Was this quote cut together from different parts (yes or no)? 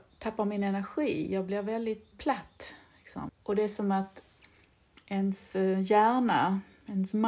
yes